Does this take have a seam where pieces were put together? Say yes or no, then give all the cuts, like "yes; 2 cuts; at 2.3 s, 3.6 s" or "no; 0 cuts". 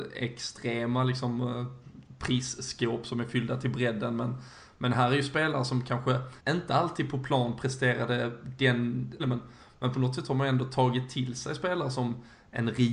yes; 2 cuts; at 6.4 s, 9.2 s